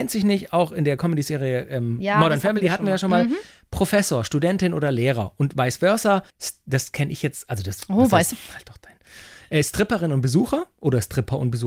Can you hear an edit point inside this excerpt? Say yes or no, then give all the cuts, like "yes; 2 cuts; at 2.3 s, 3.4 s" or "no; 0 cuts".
yes; 1 cut; at 8.3 s